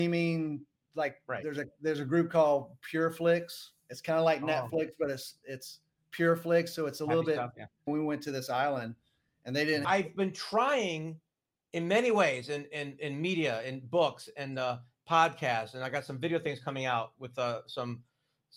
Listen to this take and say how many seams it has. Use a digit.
2